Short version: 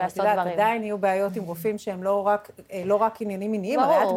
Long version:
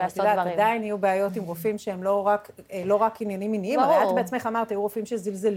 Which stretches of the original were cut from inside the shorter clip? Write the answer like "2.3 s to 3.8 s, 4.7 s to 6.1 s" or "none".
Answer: none